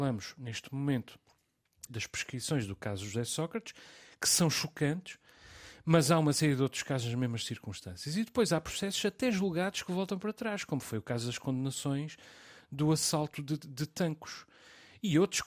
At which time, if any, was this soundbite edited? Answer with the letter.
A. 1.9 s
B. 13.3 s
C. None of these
A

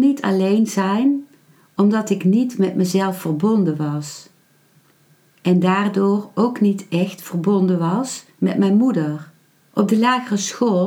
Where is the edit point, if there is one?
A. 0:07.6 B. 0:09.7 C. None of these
B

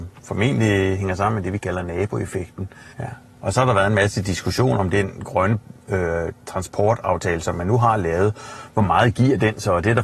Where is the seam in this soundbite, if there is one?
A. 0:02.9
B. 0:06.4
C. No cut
A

